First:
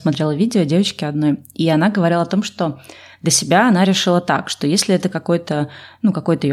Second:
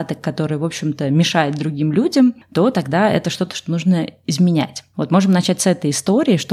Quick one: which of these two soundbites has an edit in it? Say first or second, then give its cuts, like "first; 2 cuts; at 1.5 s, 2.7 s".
second; 1 cut; at 4.9 s